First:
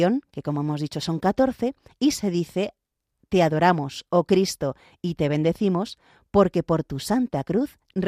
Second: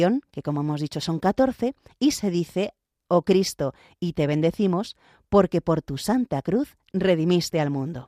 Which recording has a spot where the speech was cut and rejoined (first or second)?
second